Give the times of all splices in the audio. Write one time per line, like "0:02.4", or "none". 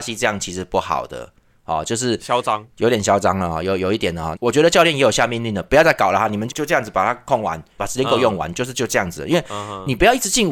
0:04.3
0:06.5
0:07.8